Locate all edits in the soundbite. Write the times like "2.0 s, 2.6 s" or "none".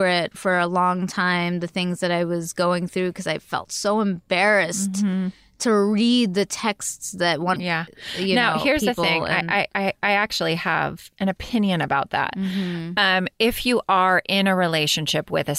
7.6 s